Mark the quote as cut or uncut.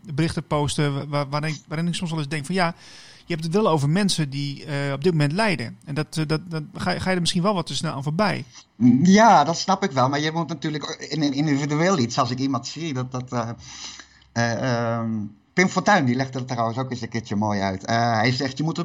cut